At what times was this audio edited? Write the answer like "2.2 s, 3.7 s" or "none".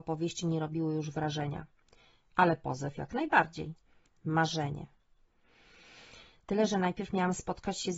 4.1 s

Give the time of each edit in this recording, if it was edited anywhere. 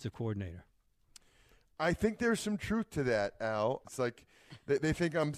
3.8 s

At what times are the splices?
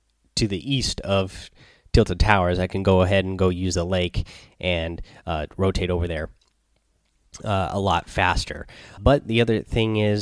9.0 s

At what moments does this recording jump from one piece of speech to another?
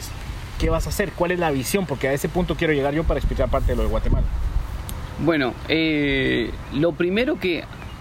none

